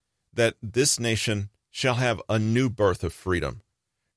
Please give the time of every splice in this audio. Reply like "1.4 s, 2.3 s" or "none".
1.7 s